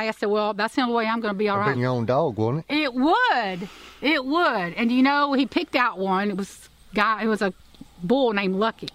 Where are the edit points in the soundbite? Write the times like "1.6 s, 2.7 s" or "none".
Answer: 1.7 s